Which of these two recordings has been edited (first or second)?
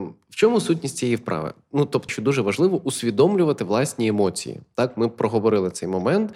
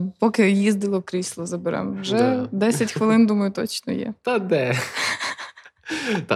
first